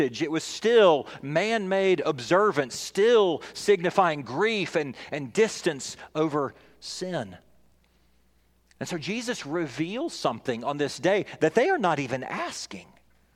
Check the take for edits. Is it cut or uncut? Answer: uncut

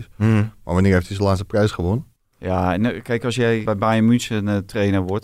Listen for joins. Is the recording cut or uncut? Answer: cut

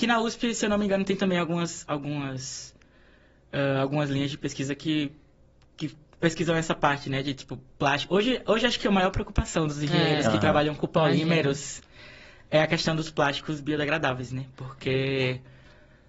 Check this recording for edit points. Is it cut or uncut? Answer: uncut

